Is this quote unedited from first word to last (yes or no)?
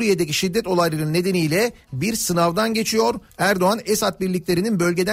no